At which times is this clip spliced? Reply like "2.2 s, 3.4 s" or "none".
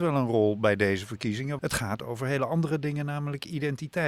1.6 s